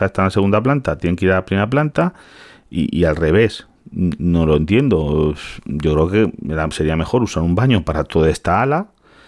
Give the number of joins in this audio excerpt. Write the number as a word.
zero